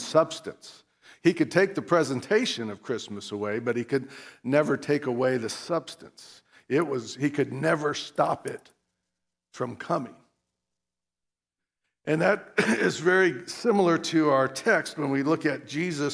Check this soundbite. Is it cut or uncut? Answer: uncut